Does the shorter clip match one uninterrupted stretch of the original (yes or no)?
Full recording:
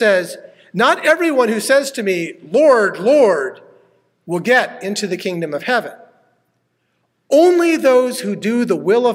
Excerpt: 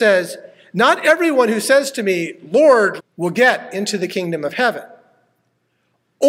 no